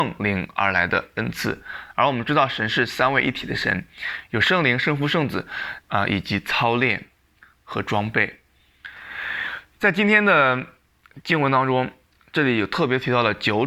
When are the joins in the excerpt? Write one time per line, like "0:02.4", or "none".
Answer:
0:05.8